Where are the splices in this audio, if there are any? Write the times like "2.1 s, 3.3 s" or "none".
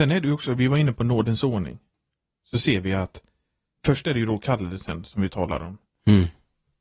none